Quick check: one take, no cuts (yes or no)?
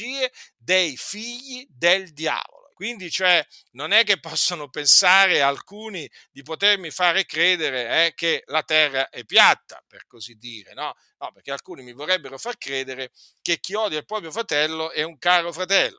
no